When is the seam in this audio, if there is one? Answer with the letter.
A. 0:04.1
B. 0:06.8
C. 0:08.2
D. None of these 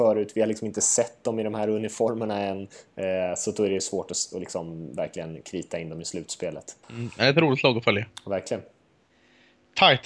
B